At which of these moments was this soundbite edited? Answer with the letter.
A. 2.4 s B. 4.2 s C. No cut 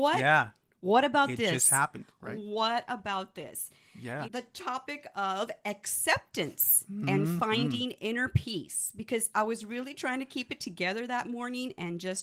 B